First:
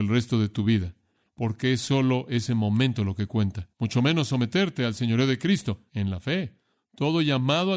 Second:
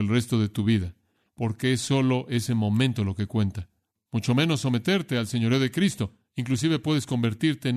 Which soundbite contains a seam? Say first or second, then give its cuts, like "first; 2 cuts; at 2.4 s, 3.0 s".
first; 2 cuts; at 3.7 s, 5.9 s